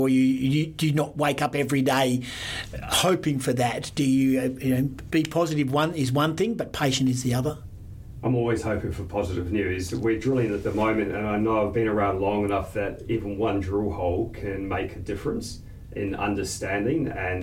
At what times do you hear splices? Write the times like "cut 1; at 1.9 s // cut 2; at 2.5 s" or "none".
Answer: none